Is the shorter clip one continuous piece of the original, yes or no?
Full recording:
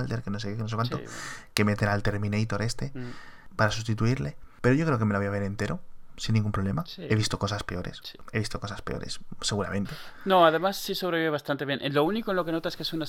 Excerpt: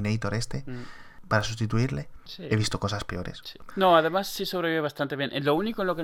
no